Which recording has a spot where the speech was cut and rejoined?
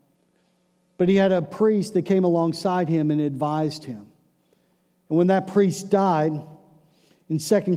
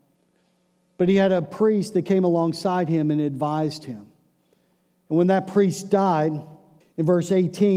second; 1 cut; at 6.8 s

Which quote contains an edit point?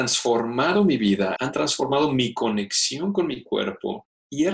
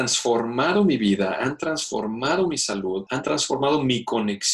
first; 1 cut; at 1.4 s

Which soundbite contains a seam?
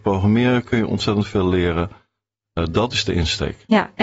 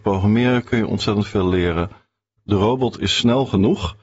second; 1 cut; at 2.4 s

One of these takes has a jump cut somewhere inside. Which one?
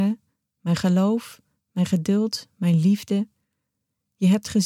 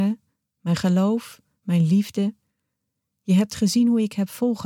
second; 1 cut; at 1.6 s

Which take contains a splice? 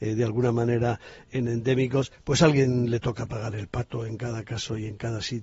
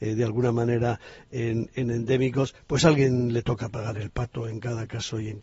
first; 1 cut; at 1.3 s

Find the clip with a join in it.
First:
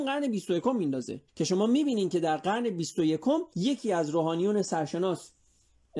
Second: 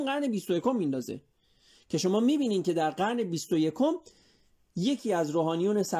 first; 2 cuts; at 1.3 s, 3.5 s

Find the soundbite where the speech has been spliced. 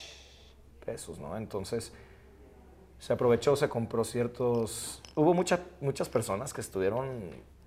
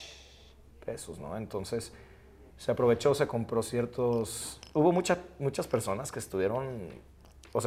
second; 1 cut; at 2.5 s

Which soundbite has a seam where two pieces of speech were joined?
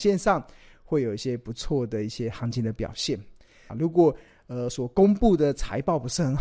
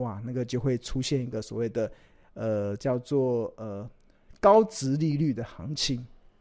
first; 1 cut; at 3.7 s

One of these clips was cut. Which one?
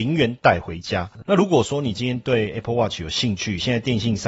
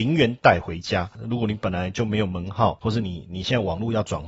first; 1 cut; at 1.2 s

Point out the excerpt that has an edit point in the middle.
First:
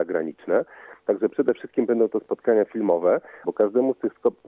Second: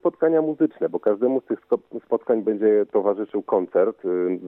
first; 1 cut; at 3.4 s

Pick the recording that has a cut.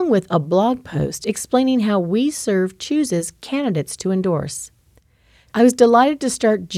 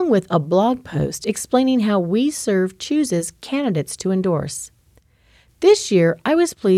first; 1 cut; at 5.5 s

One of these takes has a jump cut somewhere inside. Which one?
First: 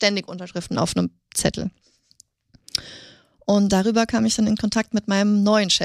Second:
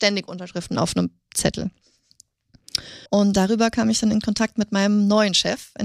second; 1 cut; at 3.1 s

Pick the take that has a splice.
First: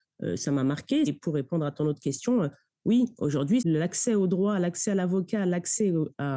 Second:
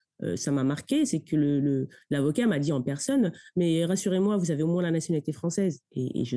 first; 2 cuts; at 1.1 s, 3.6 s

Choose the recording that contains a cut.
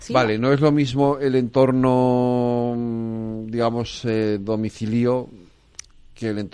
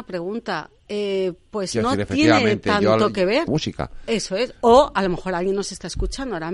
second; 1 cut; at 3.5 s

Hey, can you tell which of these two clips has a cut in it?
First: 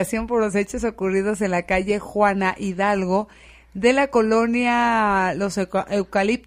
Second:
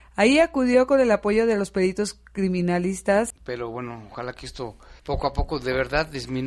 second; 2 cuts; at 3.3 s, 5.0 s

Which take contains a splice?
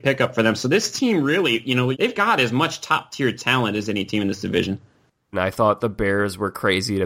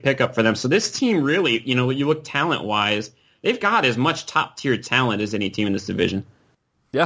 first; 2 cuts; at 1.9 s, 5.3 s

